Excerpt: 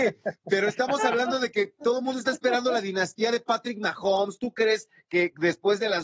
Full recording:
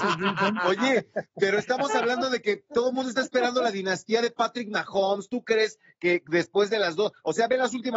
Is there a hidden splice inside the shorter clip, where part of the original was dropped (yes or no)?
no